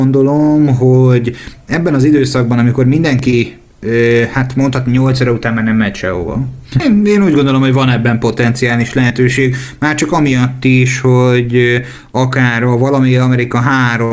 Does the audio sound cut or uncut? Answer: cut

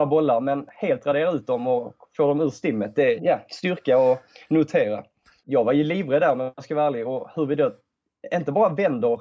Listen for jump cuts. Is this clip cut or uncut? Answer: cut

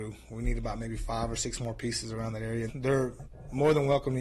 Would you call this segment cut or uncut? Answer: cut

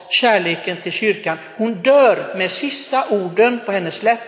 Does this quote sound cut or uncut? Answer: uncut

